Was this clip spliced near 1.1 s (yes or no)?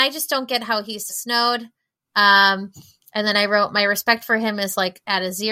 yes